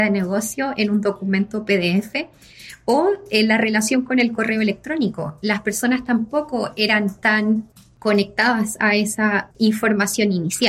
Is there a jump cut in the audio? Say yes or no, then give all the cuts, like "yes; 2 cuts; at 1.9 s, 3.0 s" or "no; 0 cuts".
yes; 2 cuts; at 7.2 s, 9.5 s